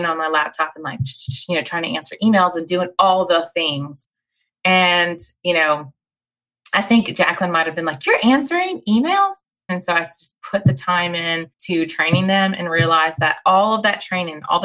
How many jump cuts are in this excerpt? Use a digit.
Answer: 2